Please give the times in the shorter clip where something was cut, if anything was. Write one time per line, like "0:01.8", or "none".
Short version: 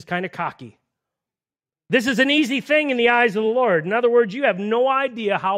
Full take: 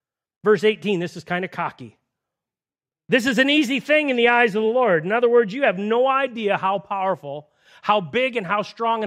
none